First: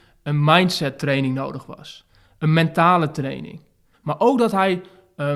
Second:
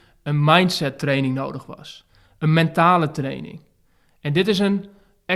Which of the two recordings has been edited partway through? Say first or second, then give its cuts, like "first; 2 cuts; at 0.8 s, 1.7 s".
first; 1 cut; at 3.9 s